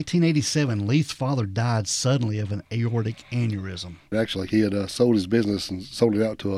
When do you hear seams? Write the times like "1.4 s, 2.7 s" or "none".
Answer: 4.1 s

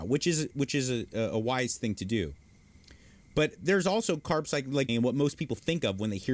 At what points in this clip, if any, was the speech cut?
4.9 s

